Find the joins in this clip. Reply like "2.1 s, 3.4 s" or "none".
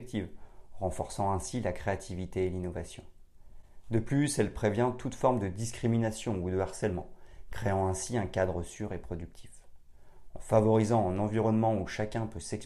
none